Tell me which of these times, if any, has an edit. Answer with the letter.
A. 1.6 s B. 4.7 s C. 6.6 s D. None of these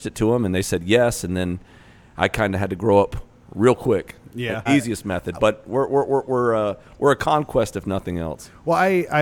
B